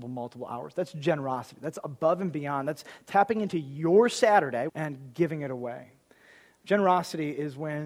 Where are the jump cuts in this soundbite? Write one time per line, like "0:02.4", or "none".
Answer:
0:04.7